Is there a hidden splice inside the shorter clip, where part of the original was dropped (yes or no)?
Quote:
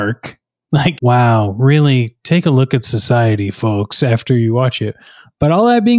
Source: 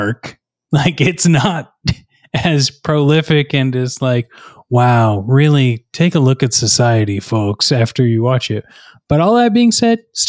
yes